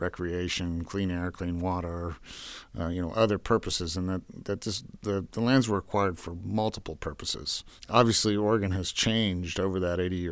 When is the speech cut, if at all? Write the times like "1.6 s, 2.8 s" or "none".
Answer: none